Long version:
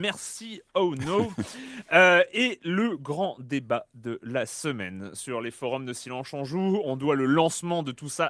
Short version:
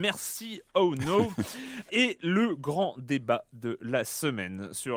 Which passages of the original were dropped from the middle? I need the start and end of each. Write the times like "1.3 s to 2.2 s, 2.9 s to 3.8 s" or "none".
1.9 s to 2.3 s